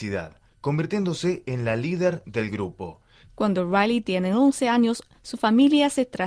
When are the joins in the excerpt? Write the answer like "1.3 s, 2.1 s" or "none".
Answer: 3.3 s